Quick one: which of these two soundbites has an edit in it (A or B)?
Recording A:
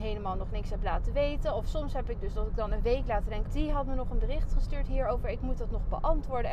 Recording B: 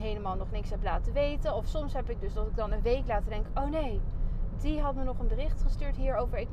A